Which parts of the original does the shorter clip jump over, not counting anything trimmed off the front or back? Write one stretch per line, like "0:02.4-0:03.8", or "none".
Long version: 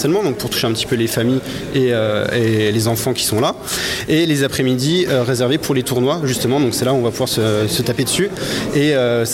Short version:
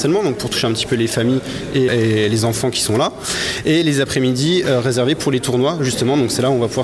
0:01.9-0:02.3